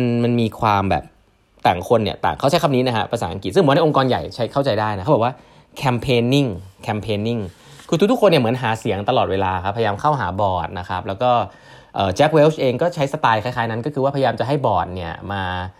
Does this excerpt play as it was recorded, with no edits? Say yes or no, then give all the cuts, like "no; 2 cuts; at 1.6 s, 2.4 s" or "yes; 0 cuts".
yes; 0 cuts